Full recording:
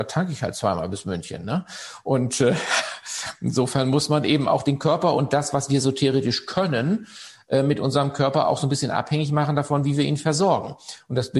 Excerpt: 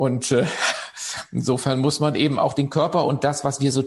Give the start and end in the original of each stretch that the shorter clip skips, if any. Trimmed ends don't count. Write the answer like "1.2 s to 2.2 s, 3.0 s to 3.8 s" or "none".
none